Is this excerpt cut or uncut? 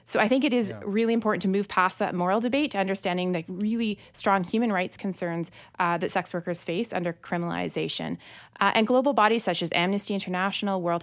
uncut